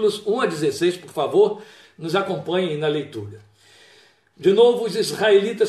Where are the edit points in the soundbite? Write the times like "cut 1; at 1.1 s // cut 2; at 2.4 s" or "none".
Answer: none